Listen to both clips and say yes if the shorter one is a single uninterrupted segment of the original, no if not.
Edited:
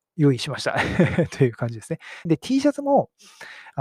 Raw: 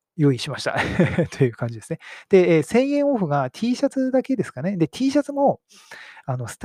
no